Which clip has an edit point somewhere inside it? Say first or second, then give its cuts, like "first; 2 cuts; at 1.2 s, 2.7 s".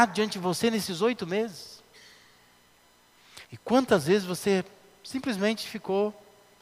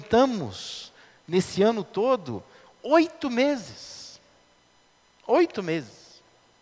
first; 1 cut; at 3.4 s